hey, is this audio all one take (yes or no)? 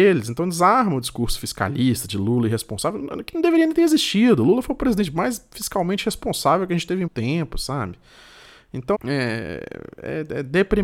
no